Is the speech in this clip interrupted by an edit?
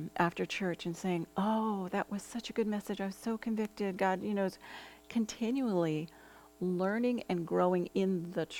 no; 0 cuts

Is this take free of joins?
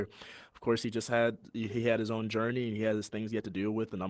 yes; 0 cuts

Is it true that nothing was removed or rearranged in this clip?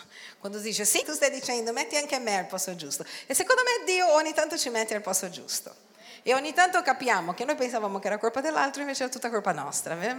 no; 1 cut; at 1.0 s

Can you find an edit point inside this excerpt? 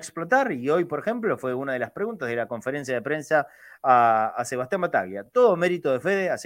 no; 0 cuts

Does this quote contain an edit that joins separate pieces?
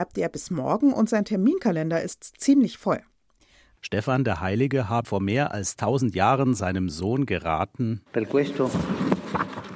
yes; 2 cuts; at 3.8 s, 5.0 s

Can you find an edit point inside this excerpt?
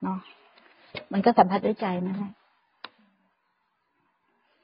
no; 0 cuts

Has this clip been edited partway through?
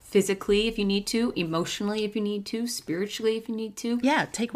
no; 0 cuts

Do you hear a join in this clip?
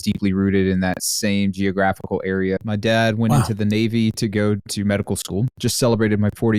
yes; 2 cuts; at 2.6 s, 5.5 s

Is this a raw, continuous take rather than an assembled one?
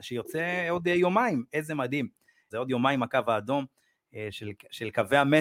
no; 1 cut; at 2.5 s

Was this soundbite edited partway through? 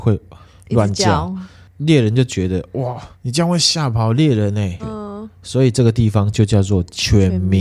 yes; 2 cuts; at 3.1 s, 4.8 s

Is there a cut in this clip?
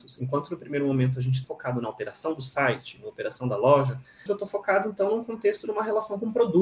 yes; 2 cuts; at 1.4 s, 4.3 s

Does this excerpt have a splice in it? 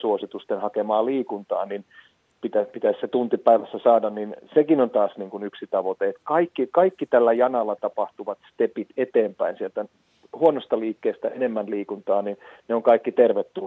no; 0 cuts

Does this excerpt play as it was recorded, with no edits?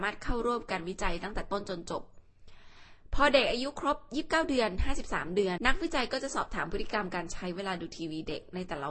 no; 1 cut; at 5.6 s

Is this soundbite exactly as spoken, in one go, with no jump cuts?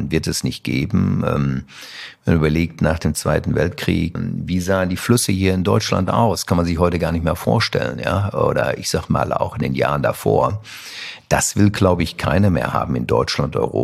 no; 1 cut; at 4.1 s

